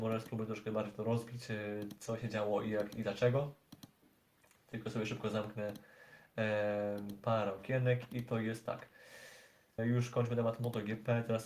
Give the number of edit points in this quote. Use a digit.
1